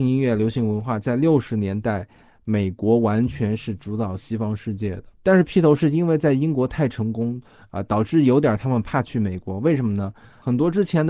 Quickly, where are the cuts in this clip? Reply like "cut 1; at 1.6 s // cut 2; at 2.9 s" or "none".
cut 1; at 5.1 s